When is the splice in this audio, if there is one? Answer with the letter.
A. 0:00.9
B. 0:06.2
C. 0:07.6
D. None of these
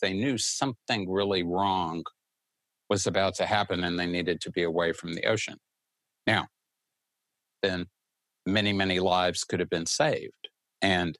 C